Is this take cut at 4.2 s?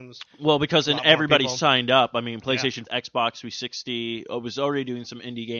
no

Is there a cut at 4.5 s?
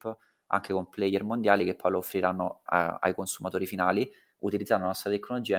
no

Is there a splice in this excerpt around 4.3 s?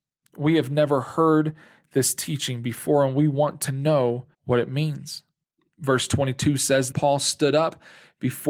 yes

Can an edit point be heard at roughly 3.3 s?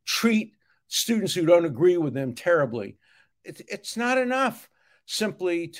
yes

